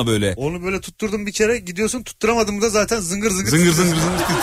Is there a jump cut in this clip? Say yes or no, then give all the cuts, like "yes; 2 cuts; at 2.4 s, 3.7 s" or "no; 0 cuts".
no; 0 cuts